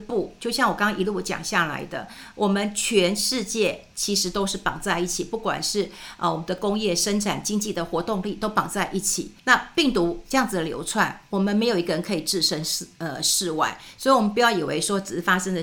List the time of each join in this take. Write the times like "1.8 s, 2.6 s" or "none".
9.4 s